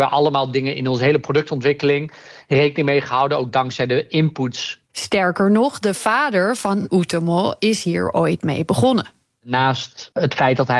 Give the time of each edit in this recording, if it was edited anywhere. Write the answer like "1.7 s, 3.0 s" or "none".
4.9 s

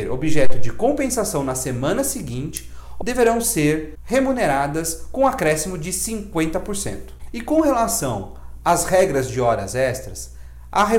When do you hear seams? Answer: 3.0 s

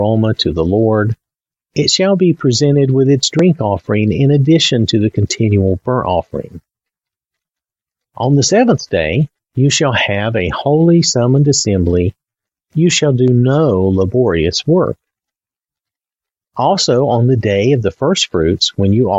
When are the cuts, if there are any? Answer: none

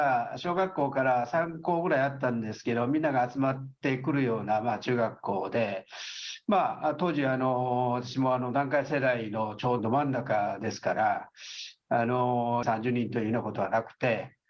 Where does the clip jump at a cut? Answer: 9.8 s, 12.6 s

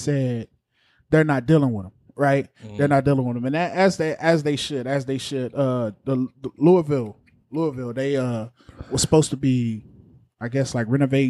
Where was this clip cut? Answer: none

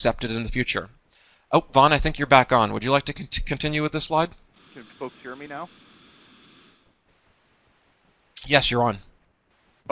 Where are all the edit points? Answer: 4.7 s

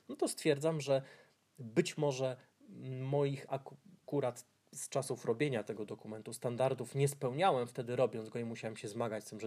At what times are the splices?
none

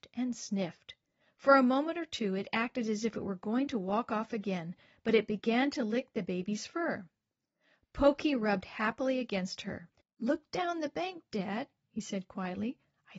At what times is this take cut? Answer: 10.0 s

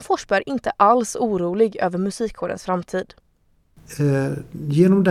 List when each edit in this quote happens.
none

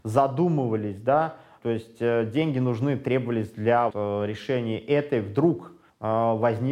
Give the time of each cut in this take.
3.9 s

